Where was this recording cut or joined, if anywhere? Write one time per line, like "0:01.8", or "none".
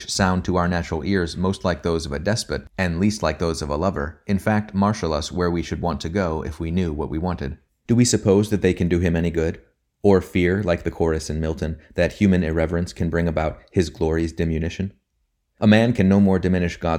0:07.8